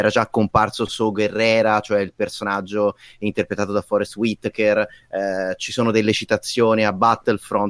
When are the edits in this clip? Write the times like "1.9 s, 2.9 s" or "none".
none